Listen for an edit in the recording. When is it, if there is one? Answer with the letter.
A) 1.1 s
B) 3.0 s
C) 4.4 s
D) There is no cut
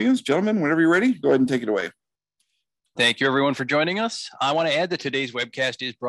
B